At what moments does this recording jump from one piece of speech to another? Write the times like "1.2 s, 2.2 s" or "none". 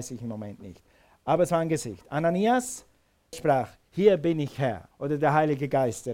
3.3 s, 4.9 s